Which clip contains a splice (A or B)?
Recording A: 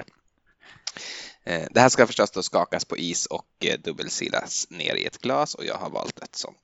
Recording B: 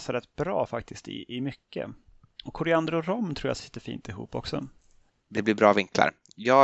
B